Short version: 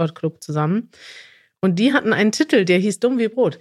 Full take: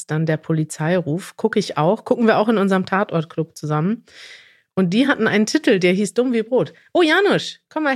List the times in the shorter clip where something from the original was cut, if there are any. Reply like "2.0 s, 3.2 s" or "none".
none